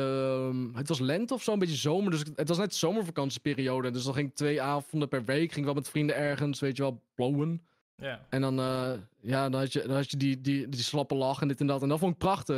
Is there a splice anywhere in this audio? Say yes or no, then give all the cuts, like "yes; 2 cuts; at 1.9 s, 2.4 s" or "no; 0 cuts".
no; 0 cuts